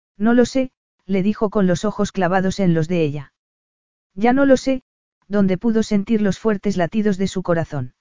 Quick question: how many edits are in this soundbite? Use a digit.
1